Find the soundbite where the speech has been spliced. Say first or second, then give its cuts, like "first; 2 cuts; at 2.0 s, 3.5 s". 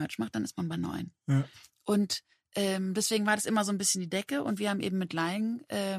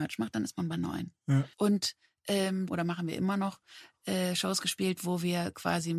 second; 2 cuts; at 1.5 s, 2.7 s